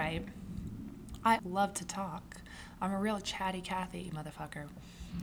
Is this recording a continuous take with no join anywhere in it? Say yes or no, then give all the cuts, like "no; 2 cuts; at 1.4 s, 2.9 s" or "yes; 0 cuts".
no; 1 cut; at 1.4 s